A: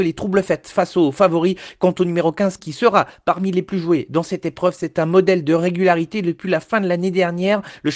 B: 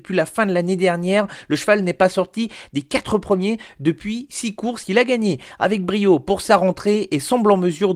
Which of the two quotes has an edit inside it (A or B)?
A